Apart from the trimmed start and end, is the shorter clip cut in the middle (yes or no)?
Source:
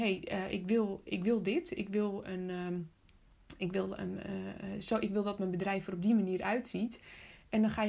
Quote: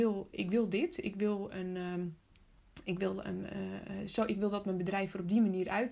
no